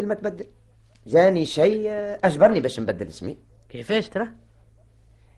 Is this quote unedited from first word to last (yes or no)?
yes